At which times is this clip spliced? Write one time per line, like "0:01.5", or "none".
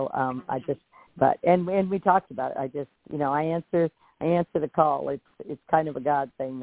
none